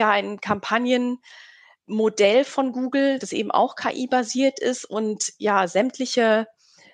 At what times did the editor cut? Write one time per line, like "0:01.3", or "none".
none